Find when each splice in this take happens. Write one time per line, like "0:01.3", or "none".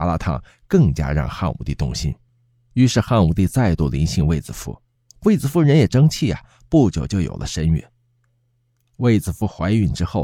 none